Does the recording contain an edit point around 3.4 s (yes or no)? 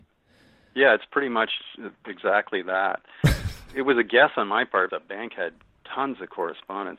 no